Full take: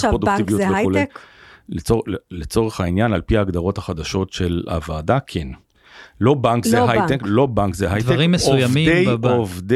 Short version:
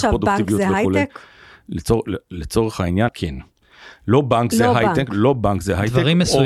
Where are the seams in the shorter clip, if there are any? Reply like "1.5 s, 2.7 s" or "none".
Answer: 3.1 s